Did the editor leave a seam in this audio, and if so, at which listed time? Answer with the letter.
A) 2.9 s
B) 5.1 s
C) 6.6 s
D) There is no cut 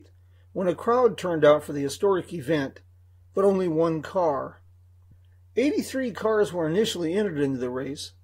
D